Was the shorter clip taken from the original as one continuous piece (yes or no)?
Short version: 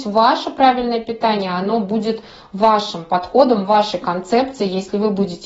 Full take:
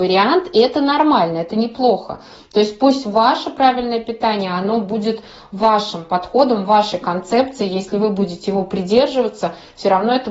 yes